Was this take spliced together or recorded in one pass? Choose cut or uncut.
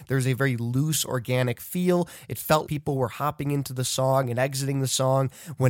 cut